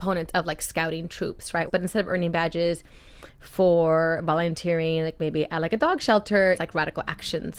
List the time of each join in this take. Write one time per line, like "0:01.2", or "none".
0:01.7
0:06.5